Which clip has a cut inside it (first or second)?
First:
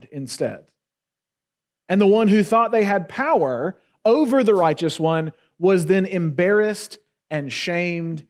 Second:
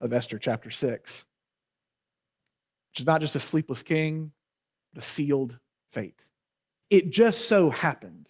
second